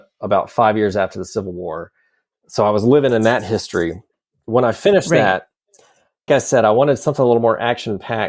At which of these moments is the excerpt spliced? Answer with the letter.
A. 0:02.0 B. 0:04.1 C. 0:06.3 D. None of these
C